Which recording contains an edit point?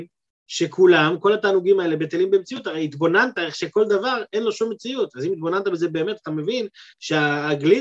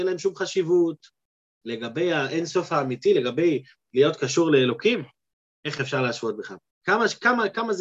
second; 1 cut; at 6.7 s

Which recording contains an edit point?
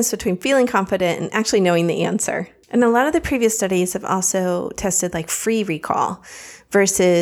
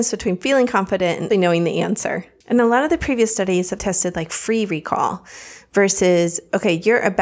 second; 2 cuts; at 1.3 s, 3.8 s

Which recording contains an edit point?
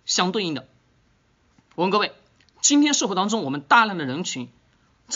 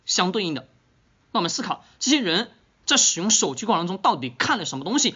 second; 1 cut; at 1.2 s

